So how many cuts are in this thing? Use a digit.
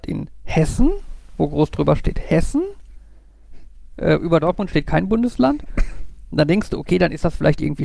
0